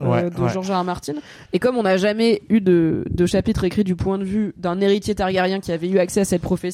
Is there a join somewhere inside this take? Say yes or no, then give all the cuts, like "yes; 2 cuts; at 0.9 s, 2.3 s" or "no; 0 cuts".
yes; 1 cut; at 1.5 s